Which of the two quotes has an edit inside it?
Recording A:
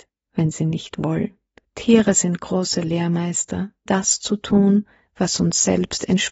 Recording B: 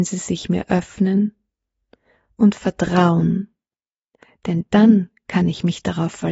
A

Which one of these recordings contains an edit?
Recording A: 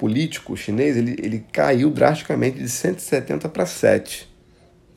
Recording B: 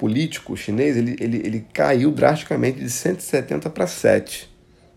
A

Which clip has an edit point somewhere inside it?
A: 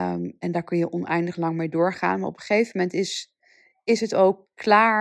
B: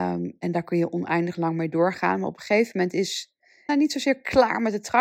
B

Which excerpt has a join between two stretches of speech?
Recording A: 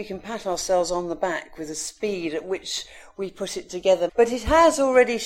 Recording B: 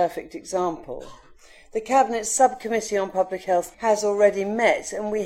A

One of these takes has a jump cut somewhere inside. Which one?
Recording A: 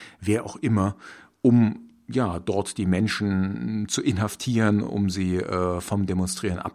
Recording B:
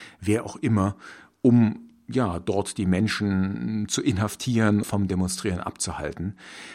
B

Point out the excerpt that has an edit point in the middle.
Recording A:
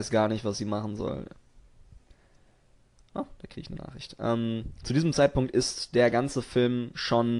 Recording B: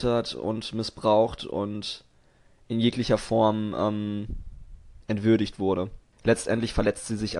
B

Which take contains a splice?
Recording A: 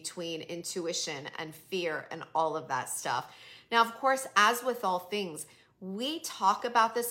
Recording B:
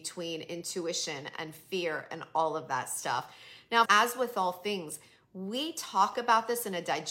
B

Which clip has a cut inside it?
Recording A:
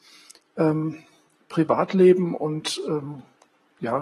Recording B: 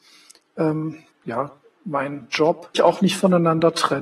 B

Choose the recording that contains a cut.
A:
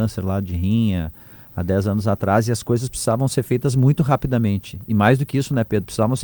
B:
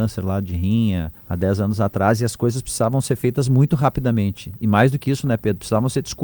B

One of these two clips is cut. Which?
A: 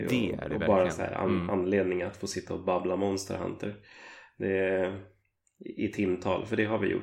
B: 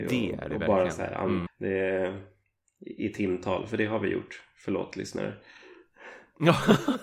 B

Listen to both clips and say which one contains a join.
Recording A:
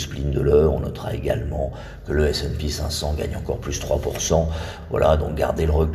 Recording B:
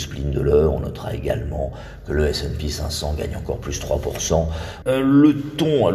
B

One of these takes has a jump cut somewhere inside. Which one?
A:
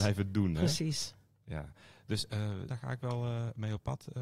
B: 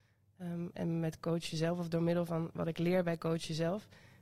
A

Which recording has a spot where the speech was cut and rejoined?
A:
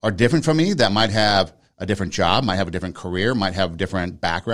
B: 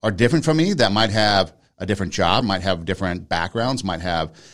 B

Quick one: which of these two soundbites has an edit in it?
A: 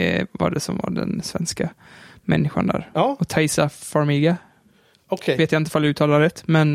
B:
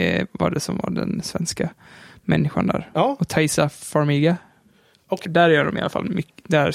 B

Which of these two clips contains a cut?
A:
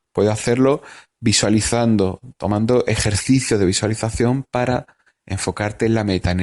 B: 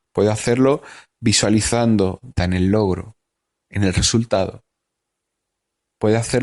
B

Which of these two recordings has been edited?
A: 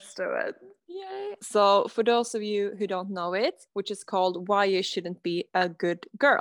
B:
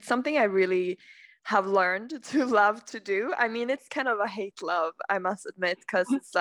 A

